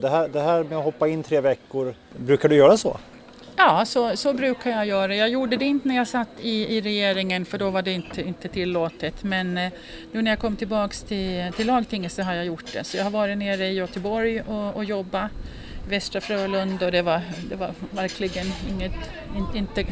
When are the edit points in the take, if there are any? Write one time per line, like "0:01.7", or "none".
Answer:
none